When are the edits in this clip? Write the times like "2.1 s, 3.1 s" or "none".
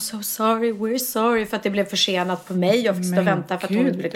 1.0 s